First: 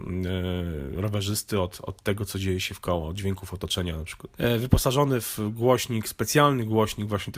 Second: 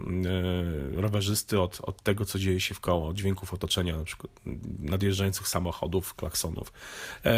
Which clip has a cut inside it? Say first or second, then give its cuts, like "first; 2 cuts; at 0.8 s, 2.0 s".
first; 1 cut; at 4.3 s